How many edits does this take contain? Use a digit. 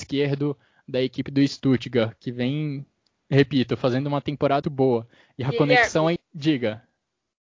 2